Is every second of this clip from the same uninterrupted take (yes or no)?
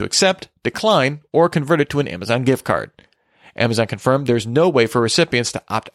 yes